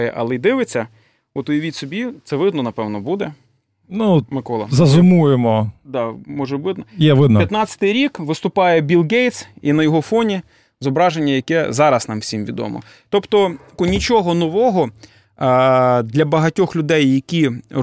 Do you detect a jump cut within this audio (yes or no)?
yes